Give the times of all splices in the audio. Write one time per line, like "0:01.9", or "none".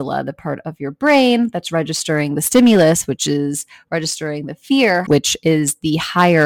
0:05.1